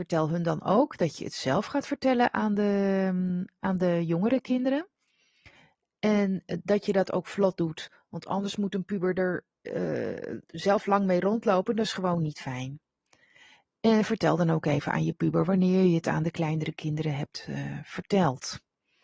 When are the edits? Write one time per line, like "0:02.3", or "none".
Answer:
none